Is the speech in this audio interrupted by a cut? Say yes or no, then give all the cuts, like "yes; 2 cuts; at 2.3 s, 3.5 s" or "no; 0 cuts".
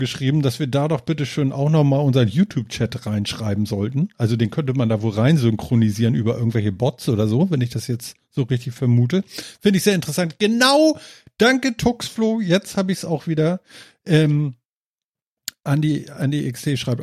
no; 0 cuts